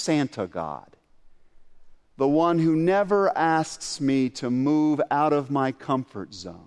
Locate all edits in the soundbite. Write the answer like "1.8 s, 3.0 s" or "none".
2.0 s